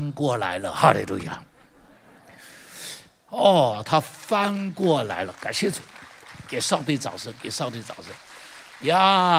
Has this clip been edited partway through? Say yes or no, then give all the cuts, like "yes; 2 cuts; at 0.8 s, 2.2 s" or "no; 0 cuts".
no; 0 cuts